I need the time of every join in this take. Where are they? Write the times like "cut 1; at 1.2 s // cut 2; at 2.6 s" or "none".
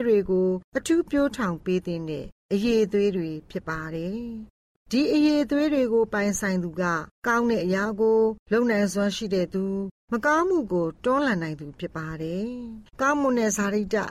cut 1; at 12.9 s